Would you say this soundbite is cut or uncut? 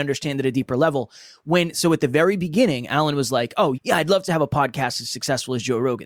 cut